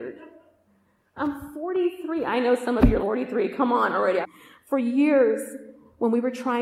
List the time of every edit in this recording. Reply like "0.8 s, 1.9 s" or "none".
3.0 s, 4.2 s